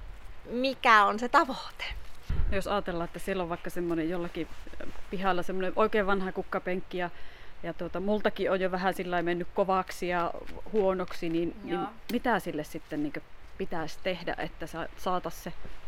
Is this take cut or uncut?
uncut